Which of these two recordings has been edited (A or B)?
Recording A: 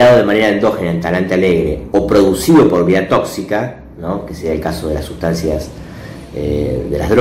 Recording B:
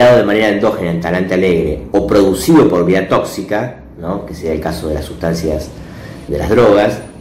B